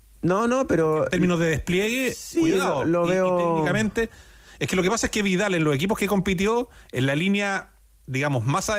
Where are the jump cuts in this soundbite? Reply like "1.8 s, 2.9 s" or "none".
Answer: none